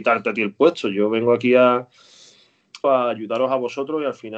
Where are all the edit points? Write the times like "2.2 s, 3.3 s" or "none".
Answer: 2.8 s